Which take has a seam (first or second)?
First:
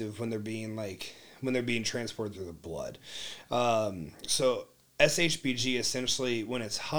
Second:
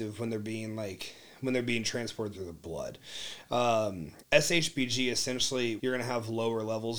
second